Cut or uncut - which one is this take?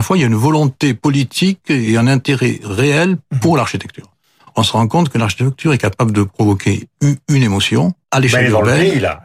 cut